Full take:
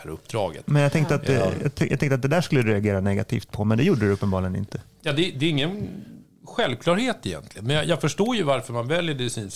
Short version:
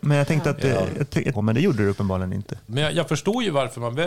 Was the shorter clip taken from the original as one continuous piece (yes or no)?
no